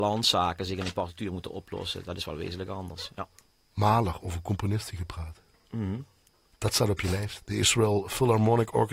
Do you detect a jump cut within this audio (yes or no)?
yes